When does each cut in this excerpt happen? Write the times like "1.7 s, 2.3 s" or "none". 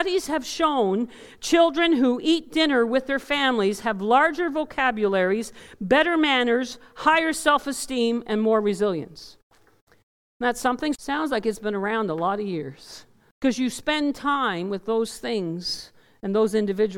11.0 s, 13.3 s